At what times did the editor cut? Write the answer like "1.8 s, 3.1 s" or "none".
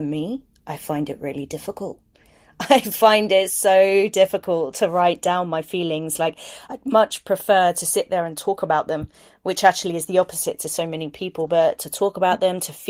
none